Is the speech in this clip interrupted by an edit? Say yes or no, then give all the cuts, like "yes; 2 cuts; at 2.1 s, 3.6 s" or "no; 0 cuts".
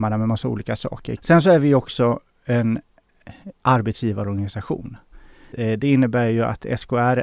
yes; 3 cuts; at 1.2 s, 3.5 s, 5.5 s